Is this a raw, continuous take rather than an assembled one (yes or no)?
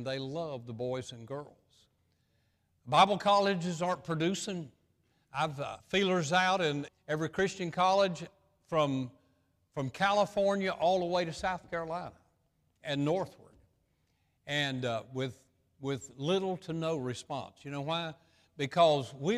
no